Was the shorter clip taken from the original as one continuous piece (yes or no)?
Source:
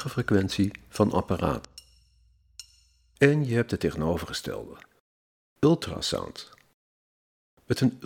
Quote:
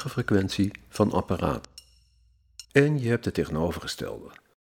no